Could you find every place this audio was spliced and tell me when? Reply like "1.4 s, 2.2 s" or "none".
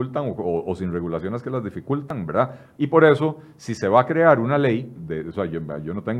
2.8 s, 5.0 s